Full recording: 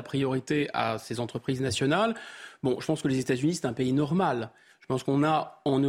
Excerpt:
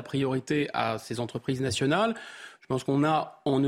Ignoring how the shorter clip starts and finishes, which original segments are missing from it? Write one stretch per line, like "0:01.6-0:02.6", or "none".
0:02.6-0:04.8

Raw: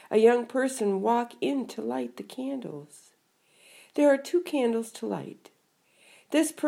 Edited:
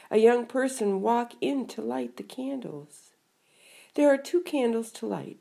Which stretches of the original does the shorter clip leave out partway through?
none

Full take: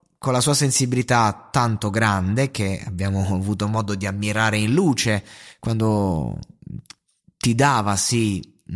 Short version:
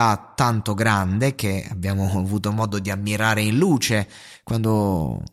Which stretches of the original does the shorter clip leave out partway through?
none

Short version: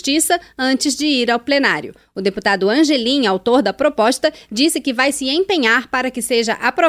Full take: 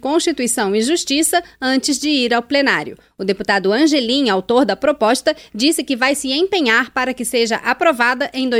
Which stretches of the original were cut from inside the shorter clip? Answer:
none

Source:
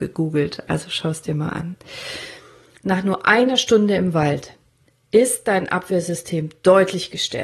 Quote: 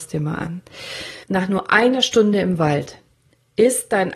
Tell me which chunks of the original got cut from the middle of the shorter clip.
0:02.4-0:02.8

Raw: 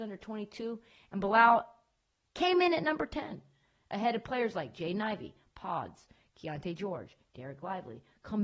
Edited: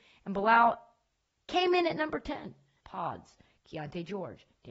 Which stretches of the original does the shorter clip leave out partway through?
0:03.7-0:05.5

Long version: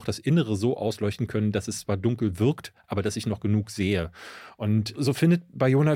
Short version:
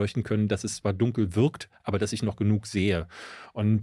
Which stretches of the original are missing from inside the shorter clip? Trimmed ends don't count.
none

